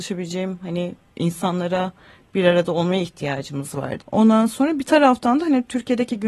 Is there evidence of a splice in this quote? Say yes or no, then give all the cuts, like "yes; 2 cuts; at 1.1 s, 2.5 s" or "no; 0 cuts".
yes; 1 cut; at 4.0 s